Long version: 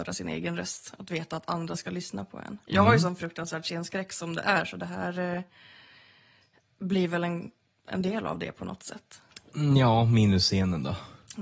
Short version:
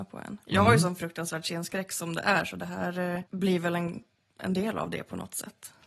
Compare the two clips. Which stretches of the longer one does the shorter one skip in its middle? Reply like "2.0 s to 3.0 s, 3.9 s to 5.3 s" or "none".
5.5 s to 6.7 s